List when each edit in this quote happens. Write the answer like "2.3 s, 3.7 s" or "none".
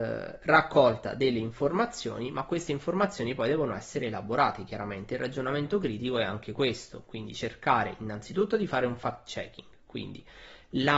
none